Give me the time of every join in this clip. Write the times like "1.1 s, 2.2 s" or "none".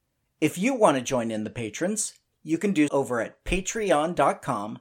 2.9 s